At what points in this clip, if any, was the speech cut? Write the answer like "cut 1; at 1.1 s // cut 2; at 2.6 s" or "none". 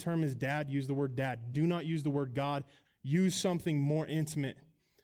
cut 1; at 1.5 s // cut 2; at 2.8 s